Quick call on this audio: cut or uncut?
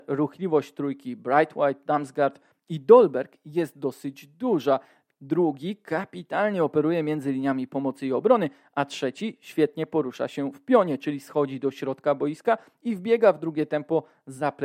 cut